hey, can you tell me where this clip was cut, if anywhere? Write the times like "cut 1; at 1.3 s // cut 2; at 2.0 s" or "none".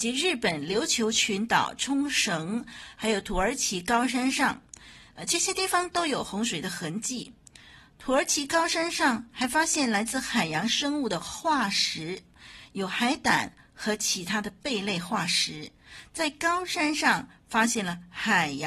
none